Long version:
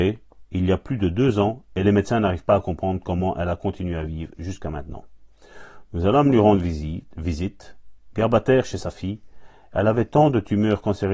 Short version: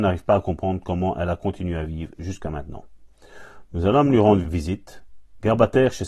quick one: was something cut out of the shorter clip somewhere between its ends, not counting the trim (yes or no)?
yes